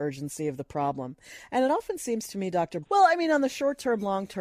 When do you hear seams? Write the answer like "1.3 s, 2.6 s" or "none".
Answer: 2.8 s

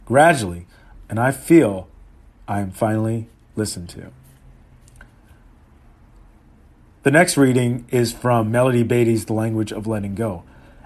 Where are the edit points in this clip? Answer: 0.9 s

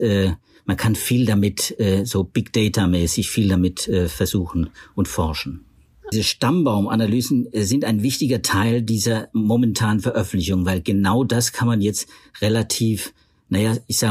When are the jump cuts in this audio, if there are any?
6.1 s

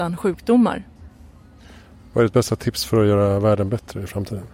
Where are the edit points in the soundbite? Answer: none

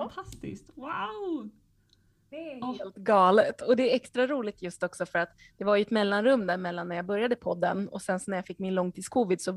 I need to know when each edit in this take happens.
none

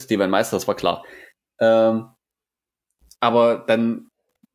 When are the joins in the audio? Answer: none

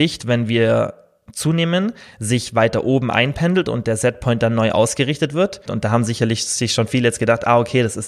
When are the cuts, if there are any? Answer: 5.7 s

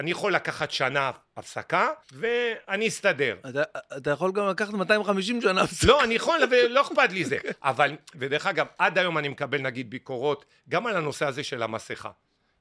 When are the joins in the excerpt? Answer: 2.0 s, 8.1 s

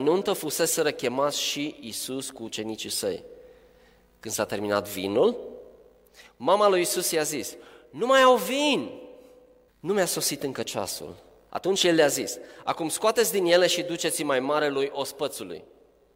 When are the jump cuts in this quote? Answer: 9.7 s, 11.5 s

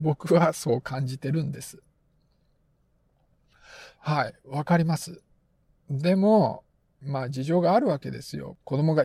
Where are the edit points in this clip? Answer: 4.0 s

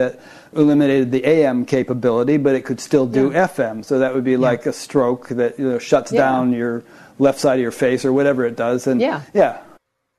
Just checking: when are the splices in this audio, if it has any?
none

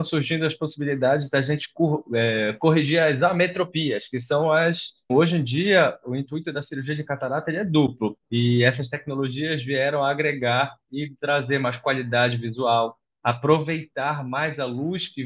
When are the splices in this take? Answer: 5.1 s, 8.2 s, 13.1 s

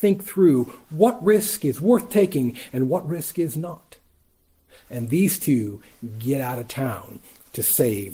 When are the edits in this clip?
none

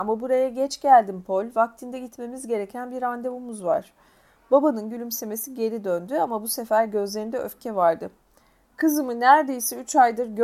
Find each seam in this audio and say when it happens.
none

